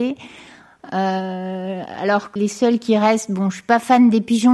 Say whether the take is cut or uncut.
cut